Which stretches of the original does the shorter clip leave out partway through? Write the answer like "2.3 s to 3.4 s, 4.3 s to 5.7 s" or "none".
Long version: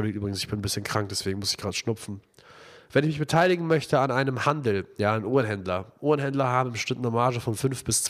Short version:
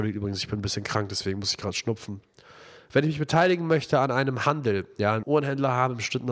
5.2 s to 6.0 s